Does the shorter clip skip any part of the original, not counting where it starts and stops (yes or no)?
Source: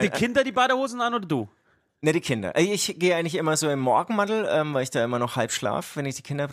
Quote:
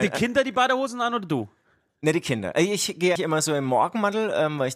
yes